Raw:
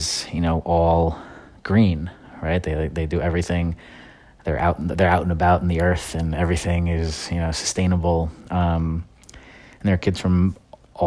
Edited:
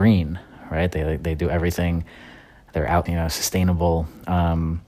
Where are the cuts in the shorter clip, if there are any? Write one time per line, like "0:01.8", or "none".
0:03.1